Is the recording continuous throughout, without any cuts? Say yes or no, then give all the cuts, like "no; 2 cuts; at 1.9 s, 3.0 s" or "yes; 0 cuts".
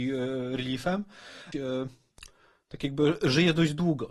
no; 1 cut; at 1.5 s